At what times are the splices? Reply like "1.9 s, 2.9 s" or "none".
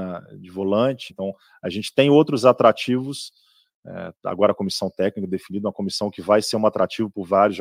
1.1 s